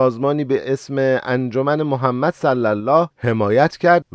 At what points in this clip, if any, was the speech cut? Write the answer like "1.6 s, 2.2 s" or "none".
none